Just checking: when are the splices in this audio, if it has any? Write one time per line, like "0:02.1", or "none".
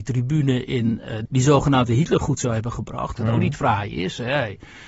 0:01.3
0:03.1